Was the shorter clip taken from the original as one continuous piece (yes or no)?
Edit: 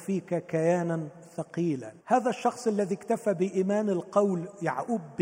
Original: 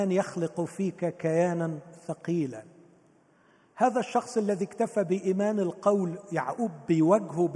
no